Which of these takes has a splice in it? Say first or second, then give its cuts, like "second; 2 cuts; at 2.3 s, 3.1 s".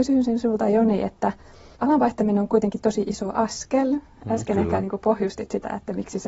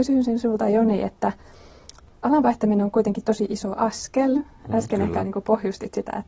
first; 1 cut; at 1.8 s